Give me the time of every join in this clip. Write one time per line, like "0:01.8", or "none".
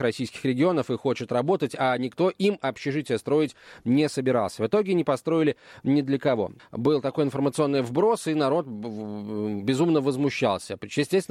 0:06.6